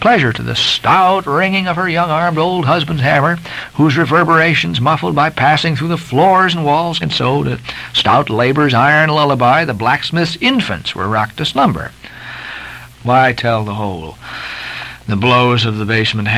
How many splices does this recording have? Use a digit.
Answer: 2